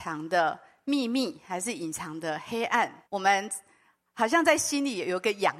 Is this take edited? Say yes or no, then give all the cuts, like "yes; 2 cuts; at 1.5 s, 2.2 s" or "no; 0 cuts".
yes; 1 cut; at 3.0 s